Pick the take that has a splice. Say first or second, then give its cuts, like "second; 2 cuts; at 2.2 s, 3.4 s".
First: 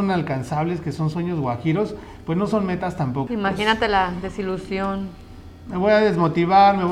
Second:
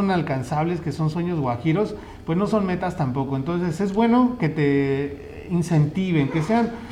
first; 1 cut; at 3.3 s